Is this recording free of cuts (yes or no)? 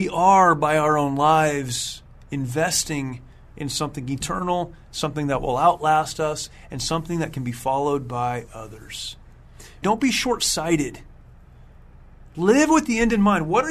no